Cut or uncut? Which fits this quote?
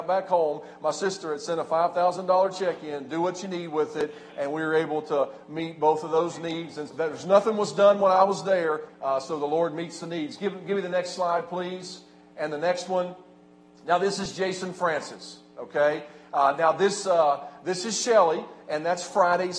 cut